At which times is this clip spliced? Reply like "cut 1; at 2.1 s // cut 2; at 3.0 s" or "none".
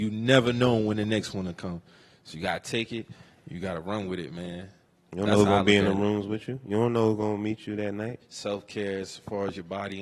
cut 1; at 8.2 s